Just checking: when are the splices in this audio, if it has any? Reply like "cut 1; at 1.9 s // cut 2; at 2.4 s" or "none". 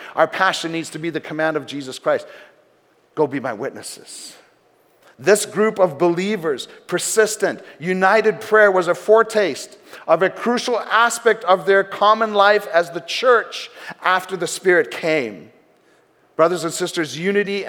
cut 1; at 5.0 s